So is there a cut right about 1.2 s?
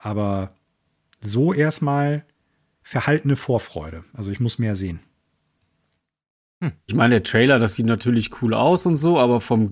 no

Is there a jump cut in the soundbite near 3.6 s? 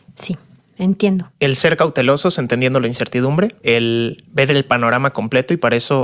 yes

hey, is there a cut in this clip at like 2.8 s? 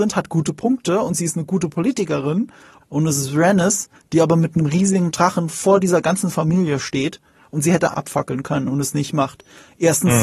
yes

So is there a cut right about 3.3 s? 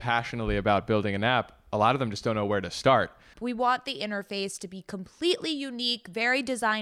yes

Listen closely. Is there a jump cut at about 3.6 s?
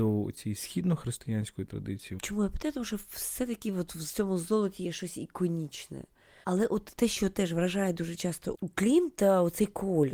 no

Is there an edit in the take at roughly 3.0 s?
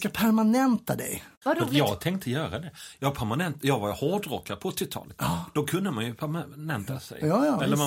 no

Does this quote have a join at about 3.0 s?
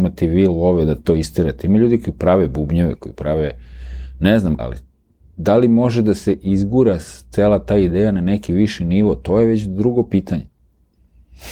yes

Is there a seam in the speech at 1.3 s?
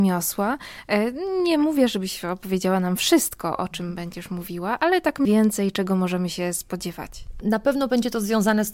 no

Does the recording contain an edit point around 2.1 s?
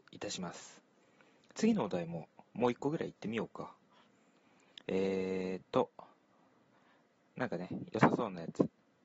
no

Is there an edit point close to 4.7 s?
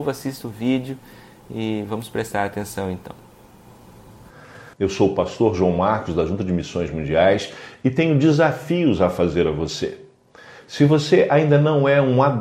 yes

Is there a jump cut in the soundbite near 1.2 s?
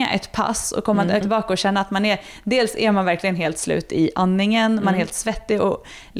yes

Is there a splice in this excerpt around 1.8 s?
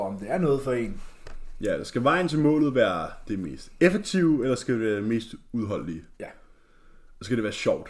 no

